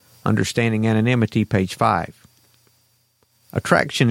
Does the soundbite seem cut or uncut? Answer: uncut